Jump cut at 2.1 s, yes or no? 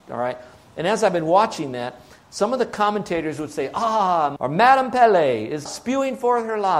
no